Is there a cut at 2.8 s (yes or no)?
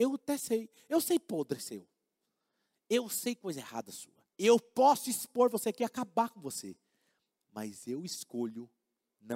no